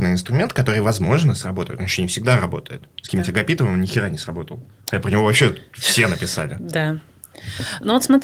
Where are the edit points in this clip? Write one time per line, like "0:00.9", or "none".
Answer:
none